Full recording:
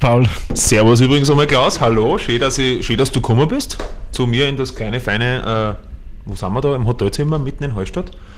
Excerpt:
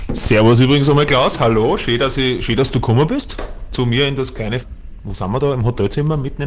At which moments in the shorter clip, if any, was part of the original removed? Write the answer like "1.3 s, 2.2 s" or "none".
4.6 s